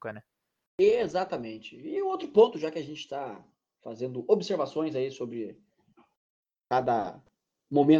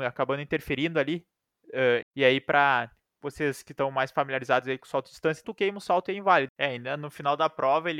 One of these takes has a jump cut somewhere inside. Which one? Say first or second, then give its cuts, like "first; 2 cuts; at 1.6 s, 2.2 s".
second; 3 cuts; at 2.0 s, 5.4 s, 6.5 s